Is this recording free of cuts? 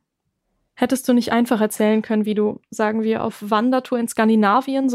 yes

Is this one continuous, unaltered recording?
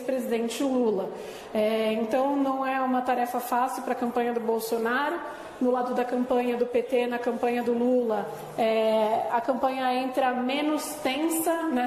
yes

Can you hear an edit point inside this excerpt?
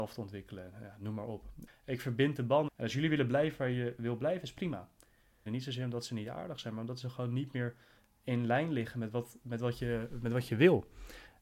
yes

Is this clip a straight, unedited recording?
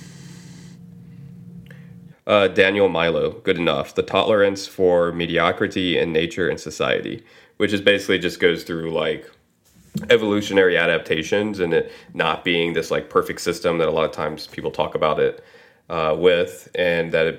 no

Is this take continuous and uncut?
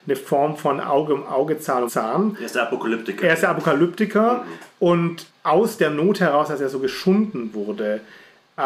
no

